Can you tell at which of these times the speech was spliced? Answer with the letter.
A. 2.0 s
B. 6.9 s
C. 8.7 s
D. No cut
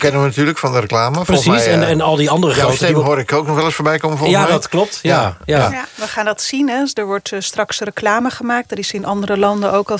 D